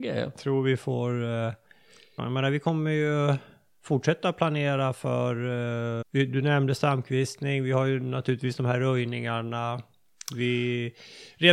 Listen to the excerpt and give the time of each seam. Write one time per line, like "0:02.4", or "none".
0:02.2
0:06.0